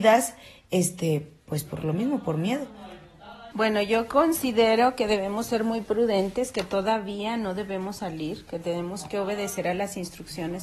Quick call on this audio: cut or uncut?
cut